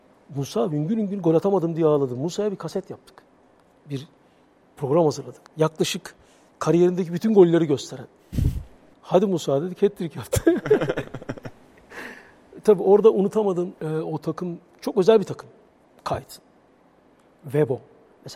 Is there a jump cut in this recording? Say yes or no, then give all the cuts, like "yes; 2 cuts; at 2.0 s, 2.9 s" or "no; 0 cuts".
yes; 3 cuts; at 5.5 s, 8.9 s, 13.8 s